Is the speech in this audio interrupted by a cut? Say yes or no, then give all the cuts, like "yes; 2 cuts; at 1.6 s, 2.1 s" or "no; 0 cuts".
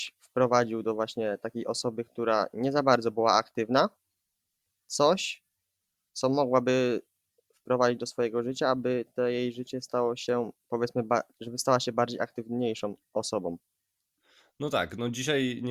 no; 0 cuts